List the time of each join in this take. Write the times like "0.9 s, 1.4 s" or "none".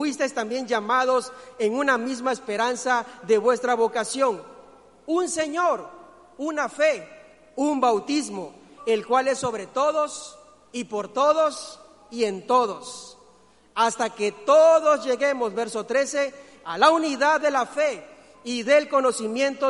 8.8 s